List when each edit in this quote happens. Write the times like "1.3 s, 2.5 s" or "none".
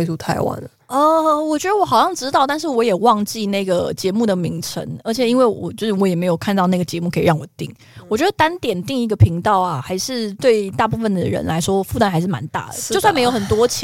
none